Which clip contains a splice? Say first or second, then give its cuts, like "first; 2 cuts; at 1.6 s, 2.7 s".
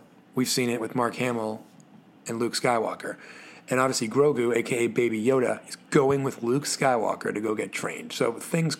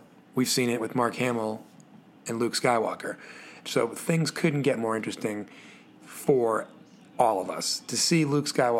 second; 1 cut; at 3.6 s